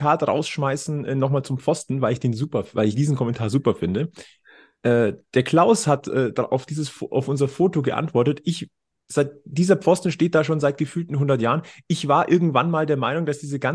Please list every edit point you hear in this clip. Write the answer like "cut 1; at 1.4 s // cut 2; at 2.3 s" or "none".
none